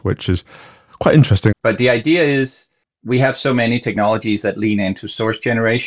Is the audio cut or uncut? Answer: cut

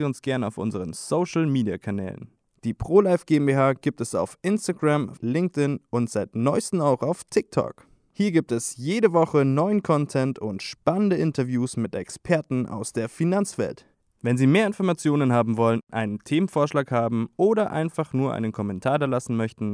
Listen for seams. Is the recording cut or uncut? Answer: cut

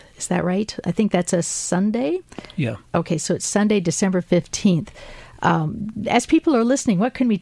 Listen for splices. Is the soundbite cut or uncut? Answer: uncut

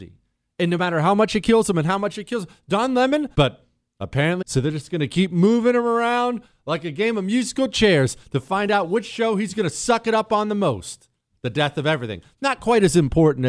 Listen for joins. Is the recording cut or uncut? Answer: cut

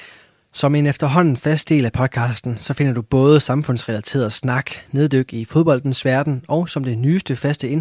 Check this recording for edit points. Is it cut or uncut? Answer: uncut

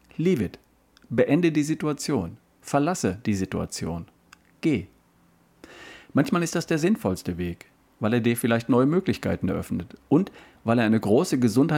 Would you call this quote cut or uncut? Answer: uncut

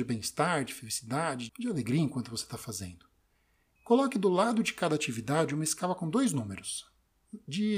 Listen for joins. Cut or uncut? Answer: cut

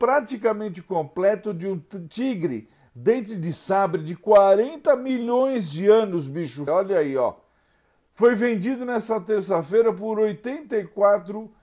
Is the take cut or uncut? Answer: cut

